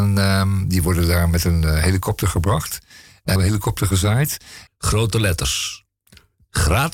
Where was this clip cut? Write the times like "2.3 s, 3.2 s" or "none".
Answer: 3.4 s, 4.7 s